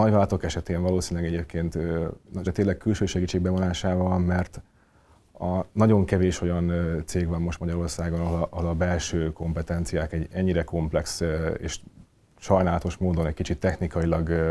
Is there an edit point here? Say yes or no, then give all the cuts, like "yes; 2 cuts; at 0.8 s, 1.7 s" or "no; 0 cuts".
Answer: yes; 1 cut; at 2.5 s